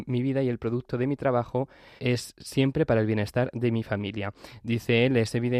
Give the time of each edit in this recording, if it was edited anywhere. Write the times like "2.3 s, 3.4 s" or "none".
2.0 s